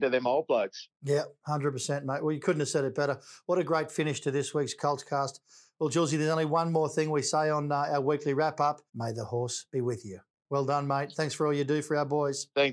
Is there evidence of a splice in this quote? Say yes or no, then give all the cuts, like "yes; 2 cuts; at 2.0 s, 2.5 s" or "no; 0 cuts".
yes; 1 cut; at 8.9 s